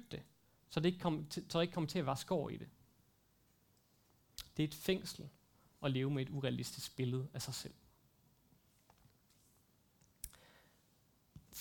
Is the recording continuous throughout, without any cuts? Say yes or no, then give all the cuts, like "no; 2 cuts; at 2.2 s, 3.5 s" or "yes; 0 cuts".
yes; 0 cuts